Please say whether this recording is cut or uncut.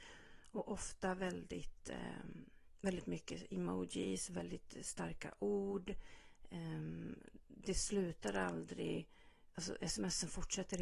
uncut